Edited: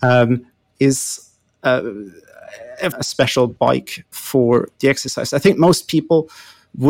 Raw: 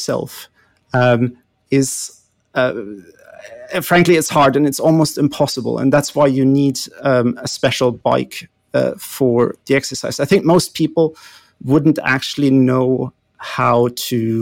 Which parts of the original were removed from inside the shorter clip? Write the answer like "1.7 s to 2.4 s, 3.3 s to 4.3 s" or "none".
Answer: 3.8 s to 7.4 s, 8.6 s to 9.0 s